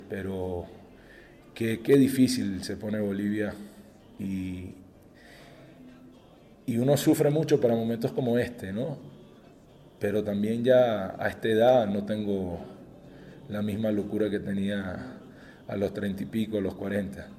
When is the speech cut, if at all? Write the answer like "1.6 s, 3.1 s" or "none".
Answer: none